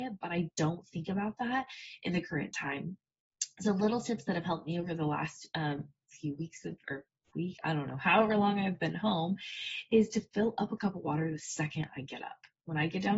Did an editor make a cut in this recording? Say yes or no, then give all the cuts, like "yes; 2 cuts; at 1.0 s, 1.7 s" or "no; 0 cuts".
no; 0 cuts